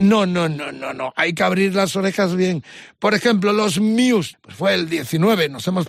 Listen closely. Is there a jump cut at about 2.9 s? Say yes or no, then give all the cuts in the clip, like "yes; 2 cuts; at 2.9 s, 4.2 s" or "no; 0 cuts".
no; 1 cut; at 4.3 s